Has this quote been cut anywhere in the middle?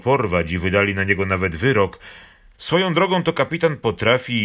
yes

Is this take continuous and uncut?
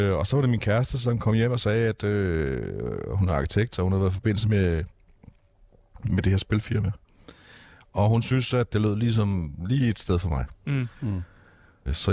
no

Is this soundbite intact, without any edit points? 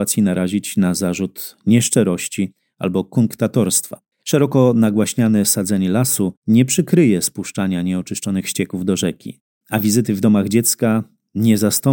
no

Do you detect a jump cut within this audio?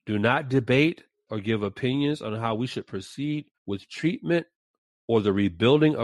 yes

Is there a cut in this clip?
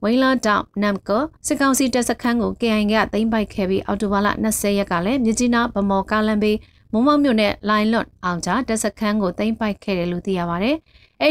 yes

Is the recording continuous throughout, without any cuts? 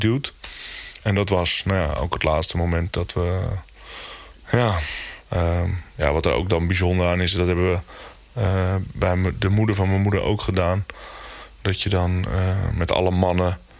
yes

